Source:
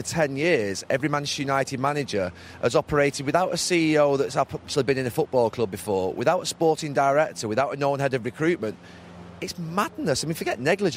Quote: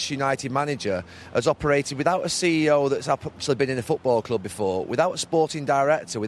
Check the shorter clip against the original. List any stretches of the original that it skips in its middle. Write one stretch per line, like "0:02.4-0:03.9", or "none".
none